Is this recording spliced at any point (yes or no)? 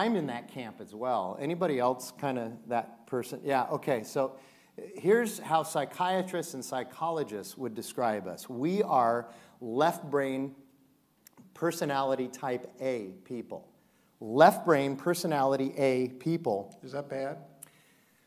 no